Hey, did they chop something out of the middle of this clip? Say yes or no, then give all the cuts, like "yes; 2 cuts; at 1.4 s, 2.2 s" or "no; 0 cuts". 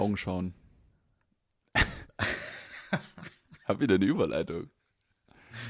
no; 0 cuts